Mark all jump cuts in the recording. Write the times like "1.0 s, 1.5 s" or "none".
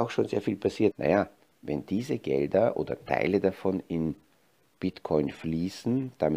0.9 s